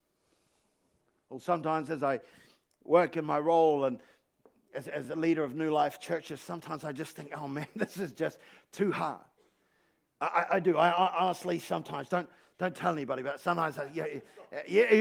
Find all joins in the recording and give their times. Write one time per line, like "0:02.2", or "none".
none